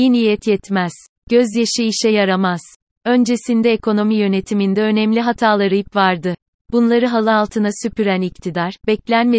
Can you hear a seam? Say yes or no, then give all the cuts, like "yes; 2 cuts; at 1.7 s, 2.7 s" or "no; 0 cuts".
yes; 1 cut; at 2.9 s